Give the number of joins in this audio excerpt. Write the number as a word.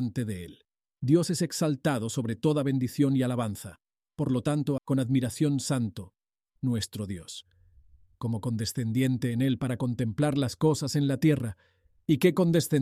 two